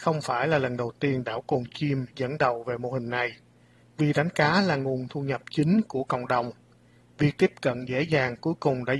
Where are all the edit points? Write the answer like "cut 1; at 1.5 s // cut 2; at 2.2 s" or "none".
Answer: cut 1; at 3.8 s